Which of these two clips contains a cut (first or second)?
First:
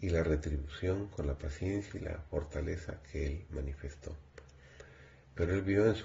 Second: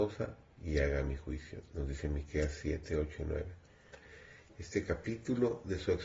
second